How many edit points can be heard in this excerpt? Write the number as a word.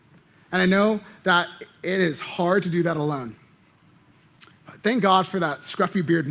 zero